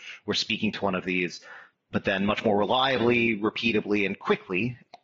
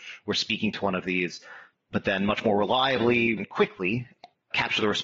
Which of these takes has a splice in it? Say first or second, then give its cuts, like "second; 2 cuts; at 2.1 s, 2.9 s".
second; 1 cut; at 3.4 s